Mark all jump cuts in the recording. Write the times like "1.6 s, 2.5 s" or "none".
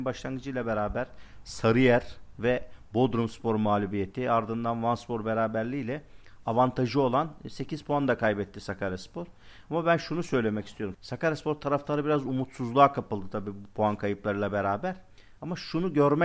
10.9 s